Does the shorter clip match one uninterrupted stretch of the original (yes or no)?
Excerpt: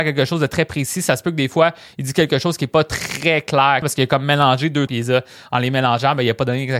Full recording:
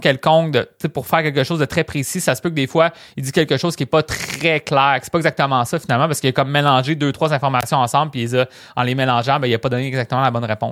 no